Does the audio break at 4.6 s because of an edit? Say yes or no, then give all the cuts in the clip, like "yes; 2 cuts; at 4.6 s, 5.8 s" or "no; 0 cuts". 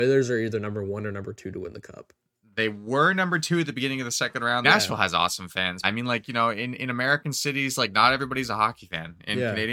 yes; 2 cuts; at 4.6 s, 5.8 s